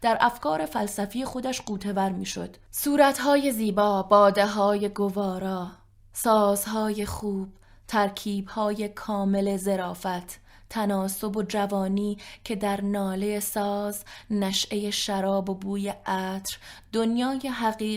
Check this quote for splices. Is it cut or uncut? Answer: cut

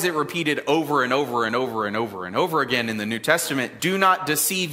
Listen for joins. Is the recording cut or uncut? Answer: cut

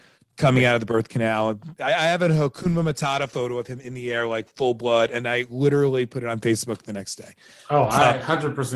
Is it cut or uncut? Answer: uncut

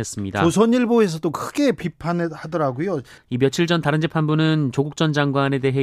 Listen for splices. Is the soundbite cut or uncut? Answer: cut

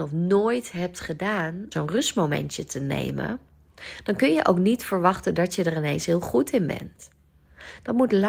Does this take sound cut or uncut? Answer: cut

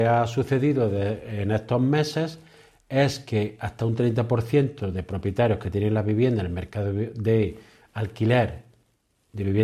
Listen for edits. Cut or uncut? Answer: uncut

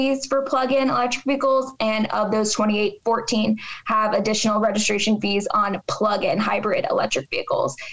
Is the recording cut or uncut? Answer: uncut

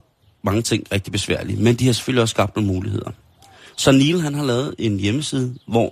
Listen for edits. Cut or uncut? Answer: uncut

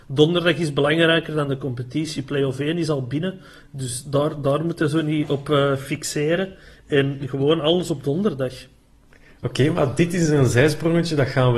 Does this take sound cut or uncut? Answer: uncut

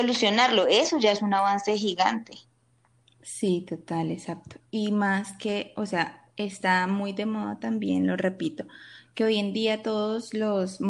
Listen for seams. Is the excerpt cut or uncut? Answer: uncut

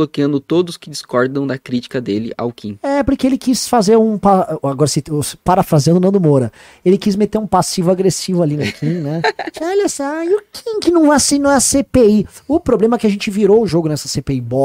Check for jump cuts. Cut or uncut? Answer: uncut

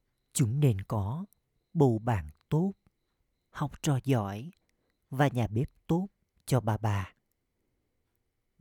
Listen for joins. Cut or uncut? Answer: uncut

